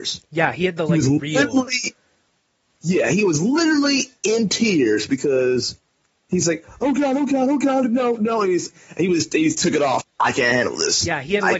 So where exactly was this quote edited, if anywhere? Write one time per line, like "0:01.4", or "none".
0:10.0